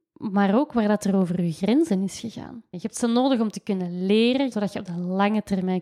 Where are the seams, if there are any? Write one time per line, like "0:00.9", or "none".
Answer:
0:02.7
0:04.5